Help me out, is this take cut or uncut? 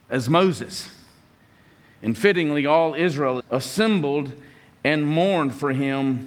cut